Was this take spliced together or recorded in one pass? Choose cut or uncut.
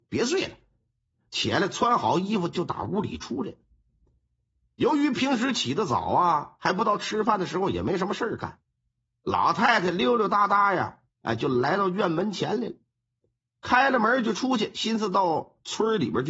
uncut